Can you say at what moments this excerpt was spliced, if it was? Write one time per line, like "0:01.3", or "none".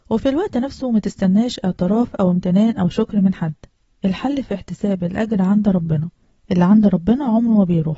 none